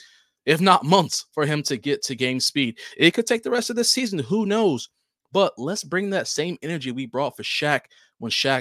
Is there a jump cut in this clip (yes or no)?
no